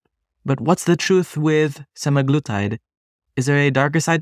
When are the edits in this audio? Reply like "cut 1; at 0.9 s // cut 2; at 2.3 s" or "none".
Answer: none